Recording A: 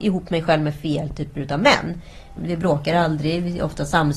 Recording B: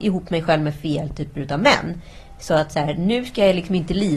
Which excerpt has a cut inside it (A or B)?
A